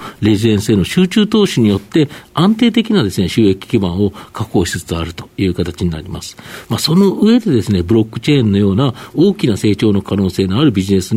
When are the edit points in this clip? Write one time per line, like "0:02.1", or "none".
none